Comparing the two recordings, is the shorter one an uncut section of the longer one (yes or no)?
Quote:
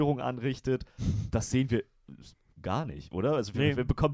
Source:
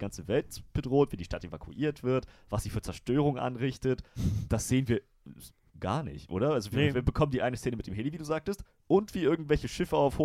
yes